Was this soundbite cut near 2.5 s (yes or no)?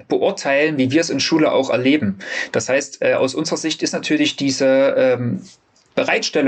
no